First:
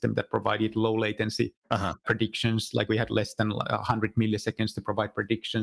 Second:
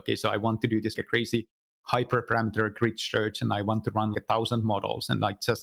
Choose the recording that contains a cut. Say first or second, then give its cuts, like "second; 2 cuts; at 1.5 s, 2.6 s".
second; 2 cuts; at 1.0 s, 4.1 s